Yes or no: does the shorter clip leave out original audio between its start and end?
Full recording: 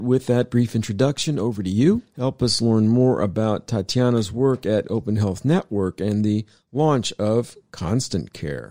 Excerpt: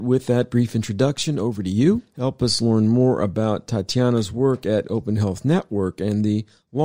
no